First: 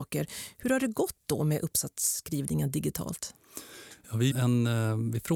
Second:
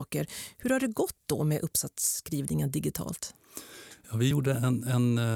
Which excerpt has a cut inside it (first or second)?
first